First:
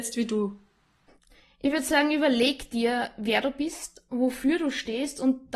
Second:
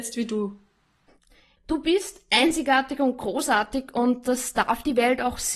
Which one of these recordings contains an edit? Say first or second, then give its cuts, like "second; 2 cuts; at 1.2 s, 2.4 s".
second; 1 cut; at 1.6 s